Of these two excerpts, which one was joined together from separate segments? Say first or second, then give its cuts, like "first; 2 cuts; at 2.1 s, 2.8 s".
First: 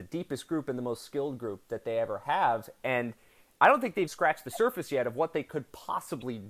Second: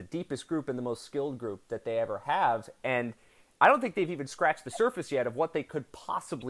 first; 1 cut; at 4.1 s